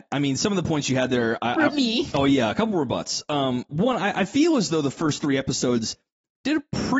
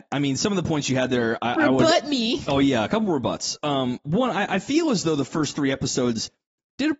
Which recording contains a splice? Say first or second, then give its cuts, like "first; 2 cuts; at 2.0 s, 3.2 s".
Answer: first; 1 cut; at 1.7 s